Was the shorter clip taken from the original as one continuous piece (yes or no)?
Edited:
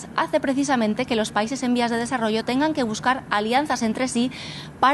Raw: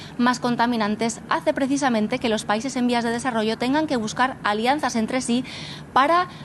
yes